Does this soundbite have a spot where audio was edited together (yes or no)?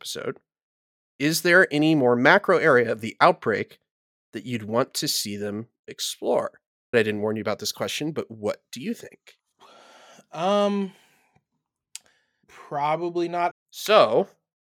yes